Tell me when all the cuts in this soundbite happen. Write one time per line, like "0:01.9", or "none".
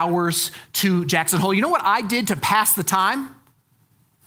none